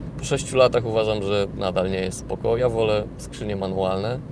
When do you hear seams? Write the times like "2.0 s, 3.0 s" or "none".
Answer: none